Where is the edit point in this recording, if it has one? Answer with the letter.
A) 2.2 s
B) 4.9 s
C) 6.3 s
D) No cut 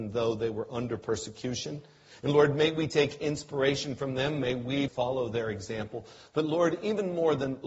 B